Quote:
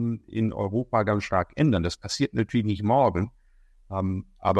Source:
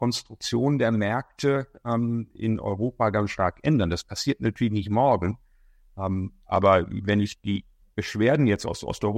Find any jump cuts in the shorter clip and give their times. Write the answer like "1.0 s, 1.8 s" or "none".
none